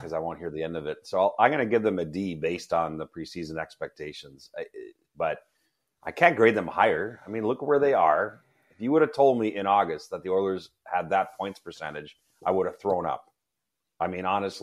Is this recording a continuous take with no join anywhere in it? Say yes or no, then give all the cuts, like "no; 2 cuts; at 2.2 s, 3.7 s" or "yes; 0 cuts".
no; 1 cut; at 5.1 s